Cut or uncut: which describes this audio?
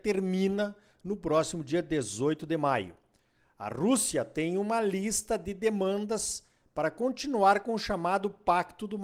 uncut